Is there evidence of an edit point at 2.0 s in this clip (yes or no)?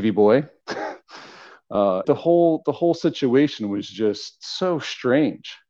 yes